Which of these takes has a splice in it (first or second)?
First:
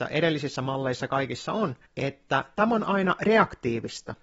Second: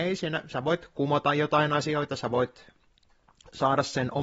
first